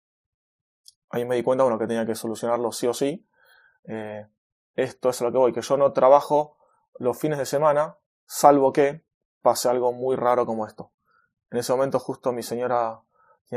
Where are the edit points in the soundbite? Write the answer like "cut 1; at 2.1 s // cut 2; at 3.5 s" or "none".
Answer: none